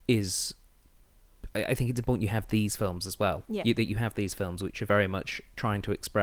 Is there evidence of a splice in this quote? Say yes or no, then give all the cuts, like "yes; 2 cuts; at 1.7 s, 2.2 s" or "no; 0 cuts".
no; 0 cuts